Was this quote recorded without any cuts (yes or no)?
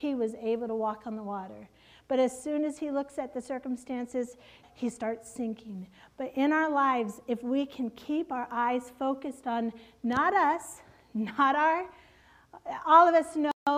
no